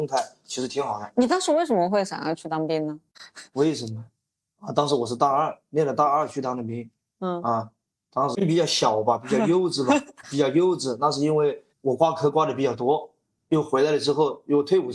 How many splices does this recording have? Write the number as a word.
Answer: two